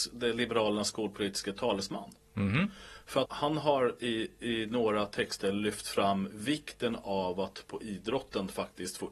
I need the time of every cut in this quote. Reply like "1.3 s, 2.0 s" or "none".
3.3 s